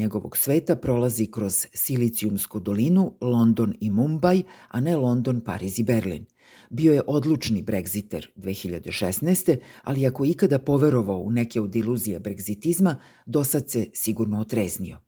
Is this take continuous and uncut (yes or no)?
yes